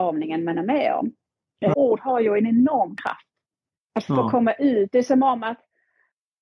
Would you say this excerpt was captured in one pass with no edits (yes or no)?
no